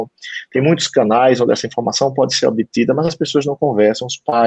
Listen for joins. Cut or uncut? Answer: uncut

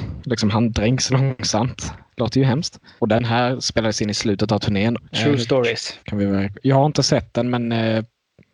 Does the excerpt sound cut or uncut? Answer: cut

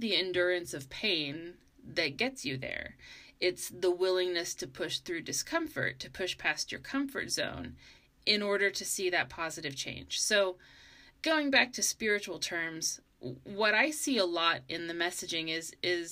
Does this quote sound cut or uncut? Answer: uncut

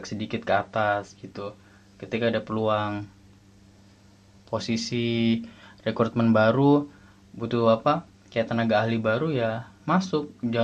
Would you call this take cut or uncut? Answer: uncut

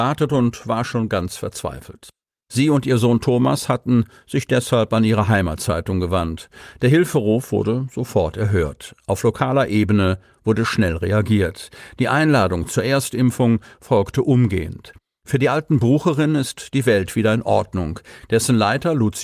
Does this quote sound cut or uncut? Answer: cut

